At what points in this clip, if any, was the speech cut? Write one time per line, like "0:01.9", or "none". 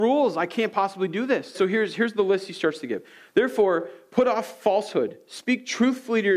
0:01.5